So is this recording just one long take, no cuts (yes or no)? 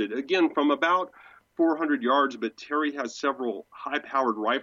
yes